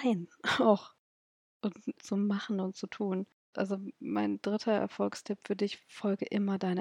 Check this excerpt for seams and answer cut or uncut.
cut